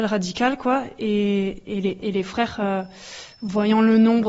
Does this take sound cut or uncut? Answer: uncut